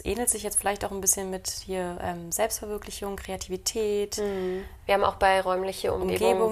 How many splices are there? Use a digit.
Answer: 1